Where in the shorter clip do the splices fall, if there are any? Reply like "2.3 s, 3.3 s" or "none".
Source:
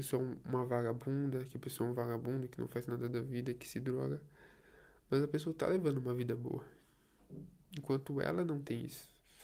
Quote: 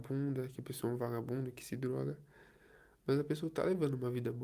1.5 s